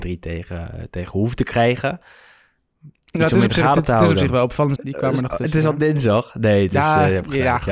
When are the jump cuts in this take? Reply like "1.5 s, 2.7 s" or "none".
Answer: 4.8 s